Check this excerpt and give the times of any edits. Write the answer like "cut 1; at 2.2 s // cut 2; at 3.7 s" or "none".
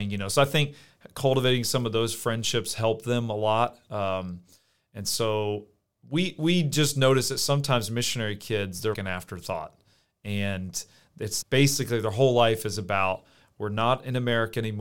cut 1; at 8.9 s // cut 2; at 11.4 s